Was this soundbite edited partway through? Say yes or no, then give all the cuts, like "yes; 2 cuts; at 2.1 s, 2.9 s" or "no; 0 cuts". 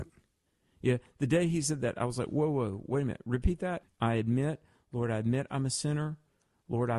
yes; 1 cut; at 3.8 s